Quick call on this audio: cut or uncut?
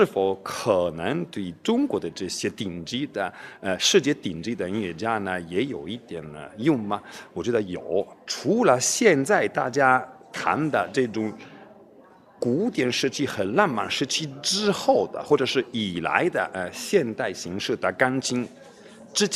uncut